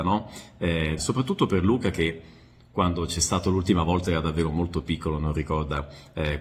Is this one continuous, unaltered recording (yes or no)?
no